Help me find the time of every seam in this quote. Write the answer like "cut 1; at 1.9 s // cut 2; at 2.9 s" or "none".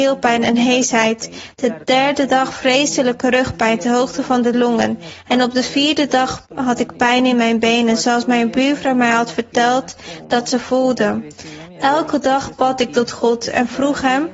none